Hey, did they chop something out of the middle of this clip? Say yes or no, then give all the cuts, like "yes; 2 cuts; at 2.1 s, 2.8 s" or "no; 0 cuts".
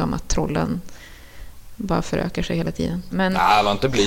yes; 1 cut; at 3.1 s